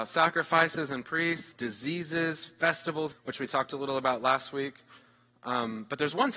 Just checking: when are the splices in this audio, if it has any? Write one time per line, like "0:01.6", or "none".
0:01.5
0:03.1